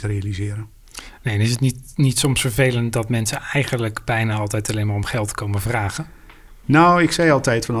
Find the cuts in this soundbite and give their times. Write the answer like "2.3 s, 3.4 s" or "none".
none